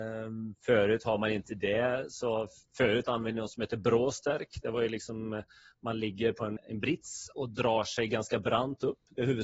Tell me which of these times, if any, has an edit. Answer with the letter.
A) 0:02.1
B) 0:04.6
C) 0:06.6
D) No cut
C